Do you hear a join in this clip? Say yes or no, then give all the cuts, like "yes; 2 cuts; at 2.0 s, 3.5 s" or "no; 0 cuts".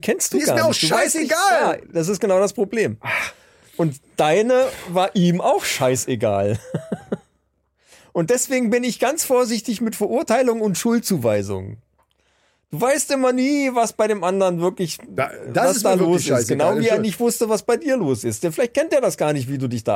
no; 0 cuts